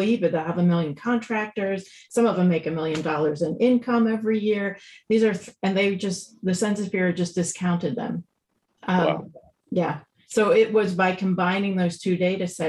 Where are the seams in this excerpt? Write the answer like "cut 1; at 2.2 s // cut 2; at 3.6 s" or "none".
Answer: none